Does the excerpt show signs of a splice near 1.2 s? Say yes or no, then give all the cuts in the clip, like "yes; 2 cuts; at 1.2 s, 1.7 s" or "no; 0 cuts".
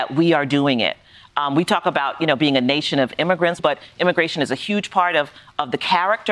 no; 1 cut; at 3.6 s